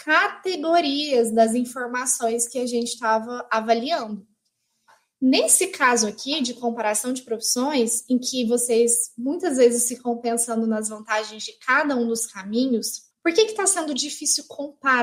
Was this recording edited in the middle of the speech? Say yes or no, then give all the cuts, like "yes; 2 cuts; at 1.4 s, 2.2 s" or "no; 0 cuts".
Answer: yes; 1 cut; at 13.1 s